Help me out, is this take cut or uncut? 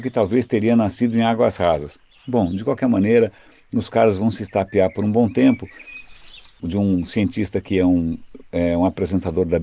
cut